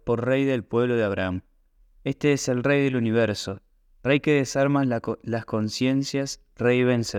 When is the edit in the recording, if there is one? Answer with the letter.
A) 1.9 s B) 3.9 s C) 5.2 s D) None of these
B